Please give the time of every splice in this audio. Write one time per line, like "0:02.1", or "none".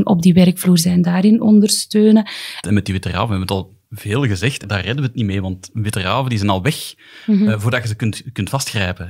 0:02.6
0:04.6